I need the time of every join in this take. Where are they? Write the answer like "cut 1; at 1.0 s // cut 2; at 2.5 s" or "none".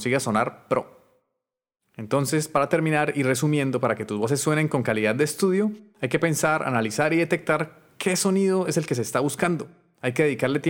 none